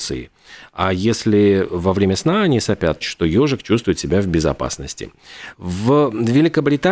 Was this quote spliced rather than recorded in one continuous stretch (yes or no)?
yes